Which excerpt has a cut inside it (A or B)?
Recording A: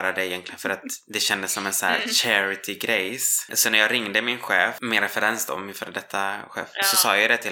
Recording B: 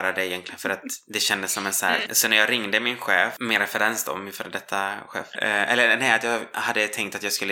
B